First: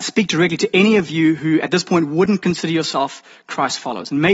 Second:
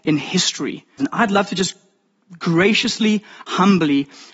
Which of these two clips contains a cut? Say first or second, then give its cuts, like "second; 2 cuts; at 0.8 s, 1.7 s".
second; 1 cut; at 1.0 s